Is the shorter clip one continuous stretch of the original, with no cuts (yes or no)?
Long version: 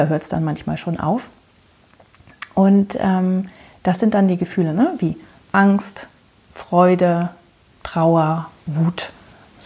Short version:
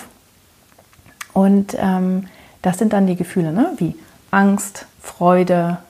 no